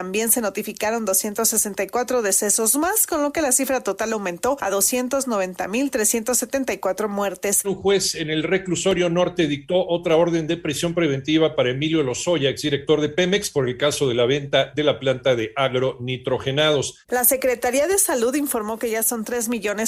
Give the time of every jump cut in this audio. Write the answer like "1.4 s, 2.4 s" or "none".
7.6 s, 17.0 s

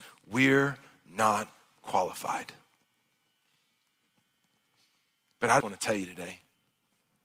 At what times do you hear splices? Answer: 5.6 s

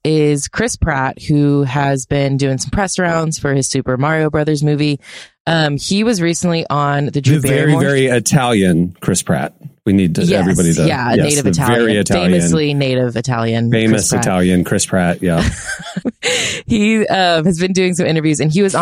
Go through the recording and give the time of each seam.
16.0 s

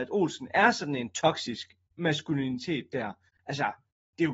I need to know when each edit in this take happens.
3.3 s

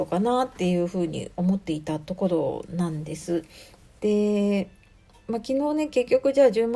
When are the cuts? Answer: 4.0 s

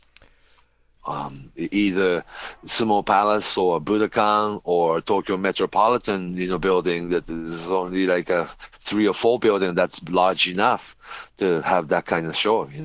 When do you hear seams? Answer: 1.0 s

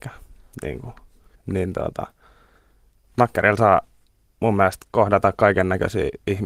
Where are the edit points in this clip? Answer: 1.3 s

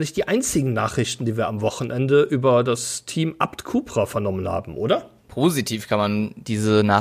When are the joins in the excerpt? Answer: 5.2 s

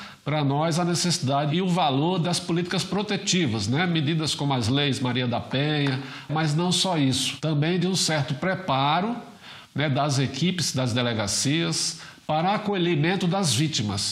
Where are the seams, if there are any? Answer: 6.3 s

